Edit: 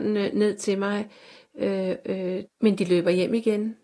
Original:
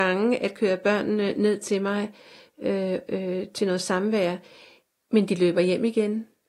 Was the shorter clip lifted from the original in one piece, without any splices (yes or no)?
no